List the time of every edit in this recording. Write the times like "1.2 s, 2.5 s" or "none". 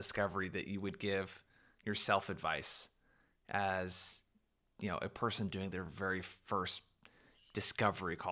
none